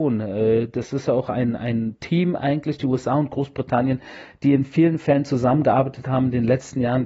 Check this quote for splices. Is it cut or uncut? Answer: uncut